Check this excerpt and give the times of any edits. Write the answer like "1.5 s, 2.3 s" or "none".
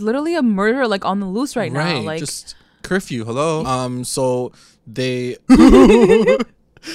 3.6 s, 5.5 s